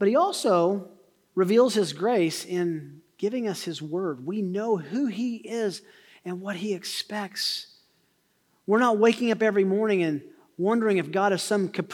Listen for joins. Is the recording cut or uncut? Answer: uncut